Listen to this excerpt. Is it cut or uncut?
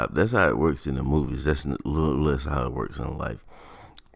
uncut